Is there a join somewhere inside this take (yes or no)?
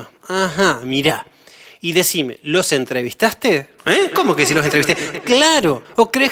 no